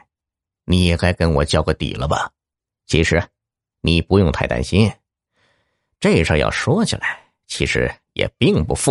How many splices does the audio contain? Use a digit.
1